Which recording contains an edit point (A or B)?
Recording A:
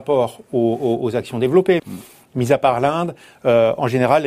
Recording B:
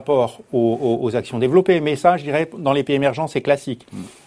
A